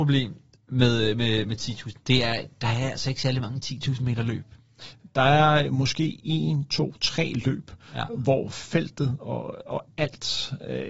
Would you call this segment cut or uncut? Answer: uncut